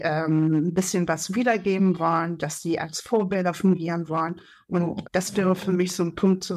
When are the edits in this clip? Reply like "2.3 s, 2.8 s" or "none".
5.0 s